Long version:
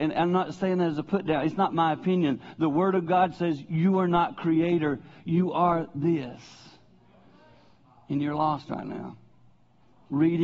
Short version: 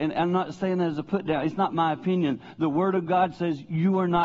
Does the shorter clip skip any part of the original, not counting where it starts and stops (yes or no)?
no